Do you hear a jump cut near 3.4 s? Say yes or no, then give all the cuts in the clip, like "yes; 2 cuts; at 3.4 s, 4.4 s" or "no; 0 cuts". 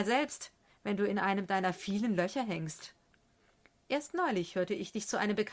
no; 0 cuts